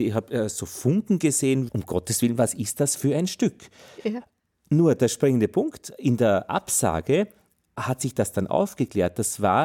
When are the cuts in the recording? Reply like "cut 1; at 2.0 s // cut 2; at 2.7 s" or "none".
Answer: cut 1; at 1.7 s